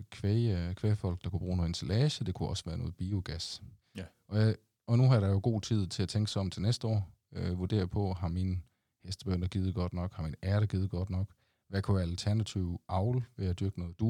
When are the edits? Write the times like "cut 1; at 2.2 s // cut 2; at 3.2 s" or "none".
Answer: none